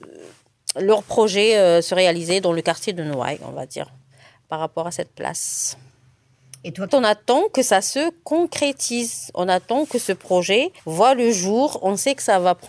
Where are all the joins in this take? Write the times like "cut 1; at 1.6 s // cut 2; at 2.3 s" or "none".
cut 1; at 6.9 s // cut 2; at 10.8 s